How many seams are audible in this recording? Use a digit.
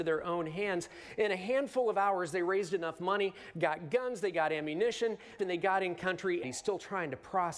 2